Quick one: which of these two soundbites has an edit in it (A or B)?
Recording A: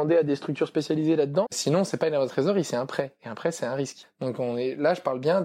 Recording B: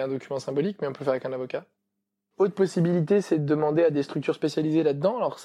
A